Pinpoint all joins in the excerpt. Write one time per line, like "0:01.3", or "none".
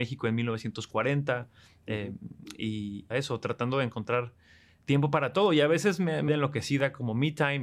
0:03.1
0:06.3